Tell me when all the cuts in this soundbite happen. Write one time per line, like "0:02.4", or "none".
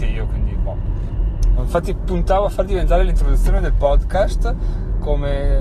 0:01.6

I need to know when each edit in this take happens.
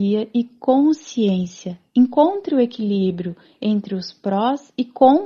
none

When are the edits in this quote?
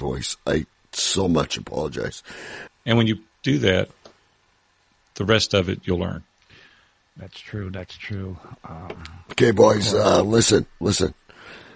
0:02.7

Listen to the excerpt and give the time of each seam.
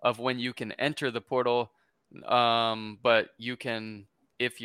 none

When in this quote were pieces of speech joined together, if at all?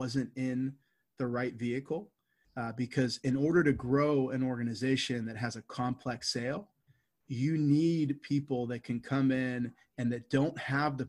0:02.4

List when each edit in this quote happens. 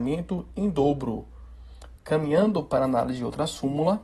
0:02.0

